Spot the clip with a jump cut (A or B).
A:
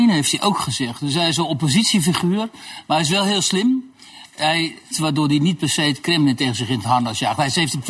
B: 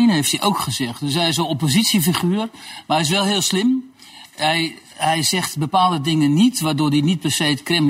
A